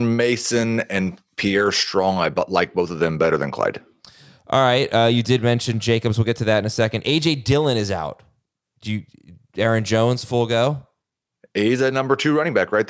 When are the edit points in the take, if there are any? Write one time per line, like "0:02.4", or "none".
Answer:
none